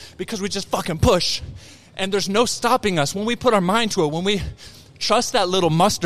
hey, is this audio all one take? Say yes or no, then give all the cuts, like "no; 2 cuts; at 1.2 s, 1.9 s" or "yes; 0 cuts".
yes; 0 cuts